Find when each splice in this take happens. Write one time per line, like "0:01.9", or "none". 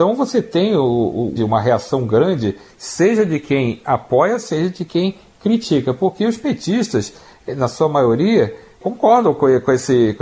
0:01.3